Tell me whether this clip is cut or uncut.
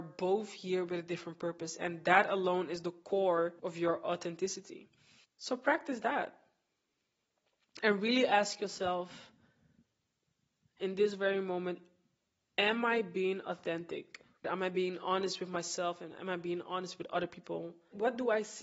cut